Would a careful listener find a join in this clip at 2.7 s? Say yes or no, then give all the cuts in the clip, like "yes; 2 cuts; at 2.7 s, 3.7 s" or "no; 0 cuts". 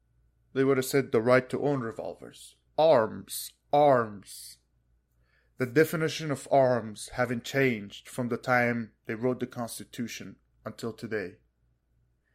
yes; 1 cut; at 2.7 s